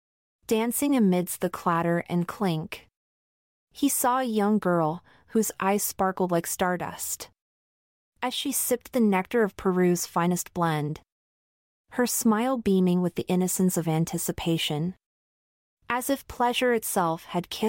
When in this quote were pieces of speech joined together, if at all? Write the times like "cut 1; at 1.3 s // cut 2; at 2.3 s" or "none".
none